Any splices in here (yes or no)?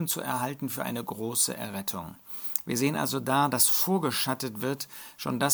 no